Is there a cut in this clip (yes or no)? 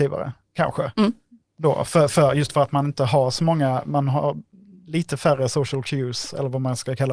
no